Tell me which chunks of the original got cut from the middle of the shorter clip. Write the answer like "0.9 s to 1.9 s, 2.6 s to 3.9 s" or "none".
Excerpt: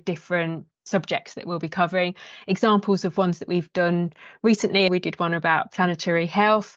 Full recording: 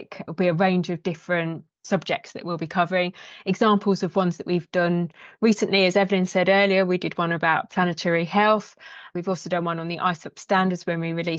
5.9 s to 6.9 s